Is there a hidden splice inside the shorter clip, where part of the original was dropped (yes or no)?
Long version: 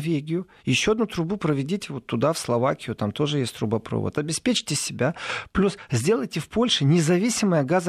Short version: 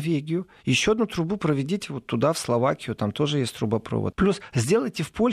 yes